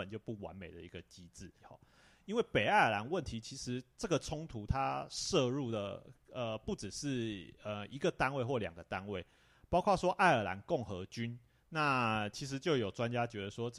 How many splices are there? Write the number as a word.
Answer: two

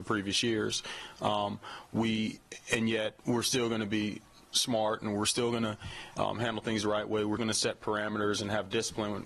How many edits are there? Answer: two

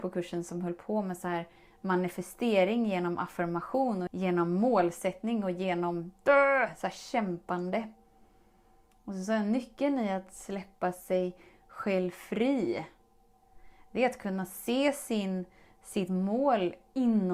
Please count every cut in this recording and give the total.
one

